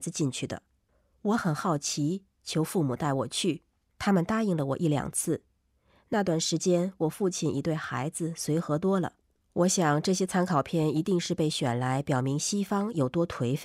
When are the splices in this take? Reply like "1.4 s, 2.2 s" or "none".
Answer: 9.4 s